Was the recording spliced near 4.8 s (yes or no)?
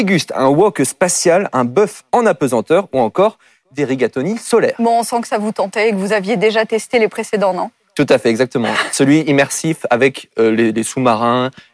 no